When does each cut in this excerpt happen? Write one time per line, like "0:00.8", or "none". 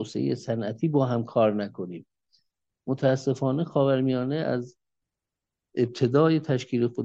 none